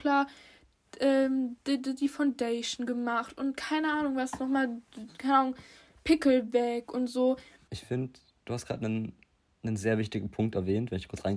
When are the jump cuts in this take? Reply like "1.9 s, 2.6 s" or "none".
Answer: none